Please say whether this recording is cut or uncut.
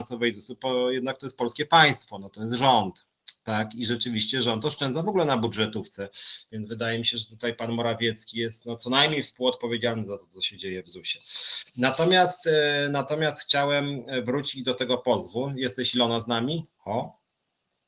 cut